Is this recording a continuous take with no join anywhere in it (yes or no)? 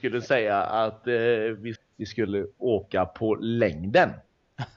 no